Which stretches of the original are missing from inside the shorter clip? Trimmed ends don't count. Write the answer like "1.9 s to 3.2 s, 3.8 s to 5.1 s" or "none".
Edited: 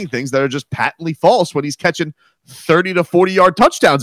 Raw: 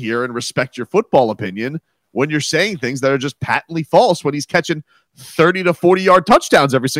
none

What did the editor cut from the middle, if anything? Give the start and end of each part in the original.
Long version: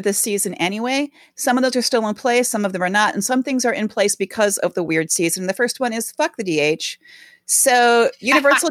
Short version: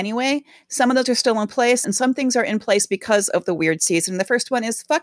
2.5 s to 3.1 s

